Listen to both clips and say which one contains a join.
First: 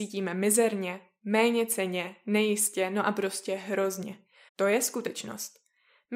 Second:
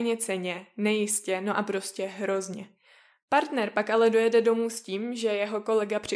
first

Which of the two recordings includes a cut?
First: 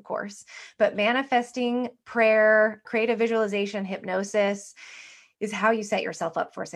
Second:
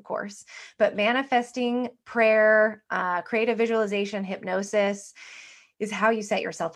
first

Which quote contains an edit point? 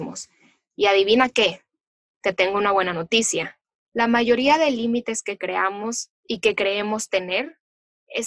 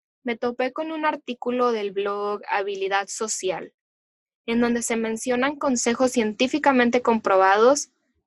first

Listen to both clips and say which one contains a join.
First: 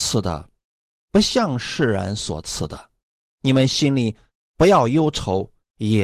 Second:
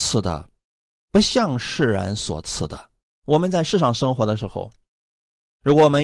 second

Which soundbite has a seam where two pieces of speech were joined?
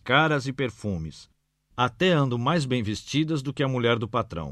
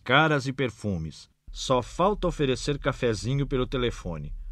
second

